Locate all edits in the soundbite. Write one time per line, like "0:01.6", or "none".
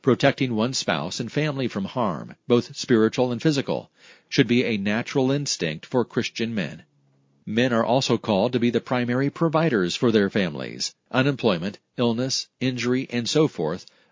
0:11.1